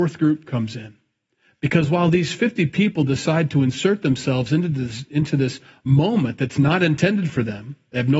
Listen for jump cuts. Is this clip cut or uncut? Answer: uncut